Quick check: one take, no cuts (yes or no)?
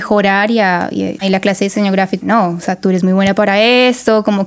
no